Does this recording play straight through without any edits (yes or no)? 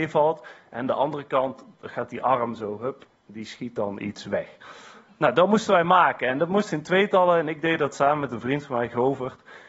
yes